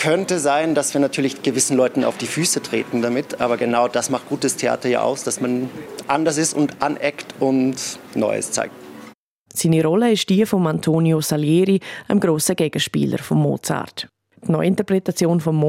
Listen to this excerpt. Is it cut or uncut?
cut